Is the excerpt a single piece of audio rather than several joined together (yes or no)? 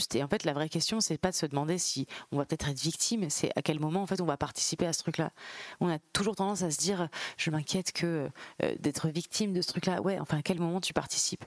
yes